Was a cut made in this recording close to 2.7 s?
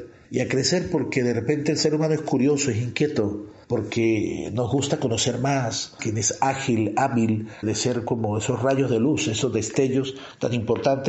no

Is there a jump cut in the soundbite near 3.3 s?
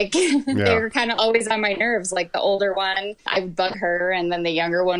yes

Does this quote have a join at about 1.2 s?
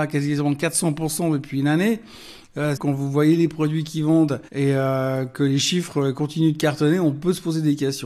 no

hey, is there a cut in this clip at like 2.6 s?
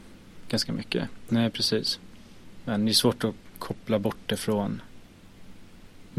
no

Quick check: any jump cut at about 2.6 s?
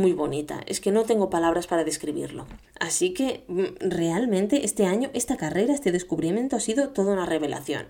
yes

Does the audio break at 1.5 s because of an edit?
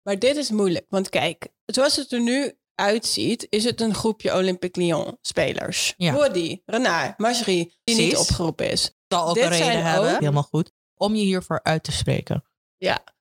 no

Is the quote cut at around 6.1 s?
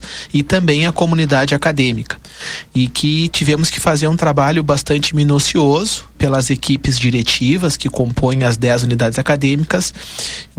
yes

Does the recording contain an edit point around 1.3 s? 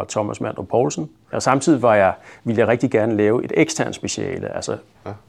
yes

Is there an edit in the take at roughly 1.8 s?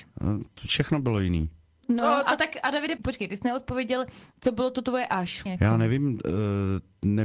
yes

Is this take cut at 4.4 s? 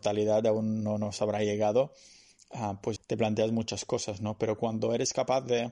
no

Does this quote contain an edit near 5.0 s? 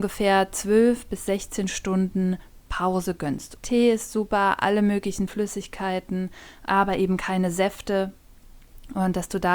no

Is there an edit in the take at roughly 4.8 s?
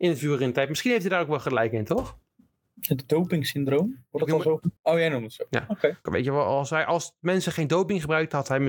yes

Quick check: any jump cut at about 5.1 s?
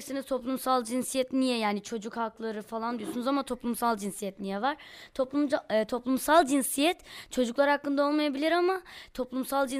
no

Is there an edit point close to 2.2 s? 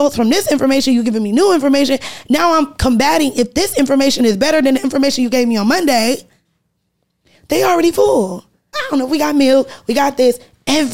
no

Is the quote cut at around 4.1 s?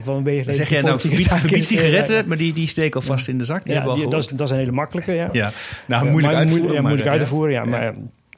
no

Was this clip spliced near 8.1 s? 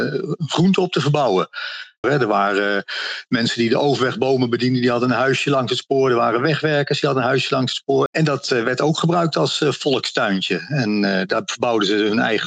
yes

